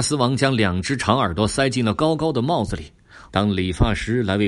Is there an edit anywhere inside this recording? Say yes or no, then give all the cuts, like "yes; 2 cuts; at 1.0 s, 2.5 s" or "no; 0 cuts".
yes; 1 cut; at 3.3 s